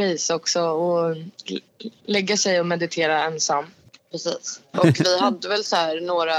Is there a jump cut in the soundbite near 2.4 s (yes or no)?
no